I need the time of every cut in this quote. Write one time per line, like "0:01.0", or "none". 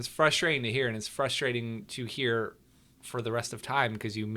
none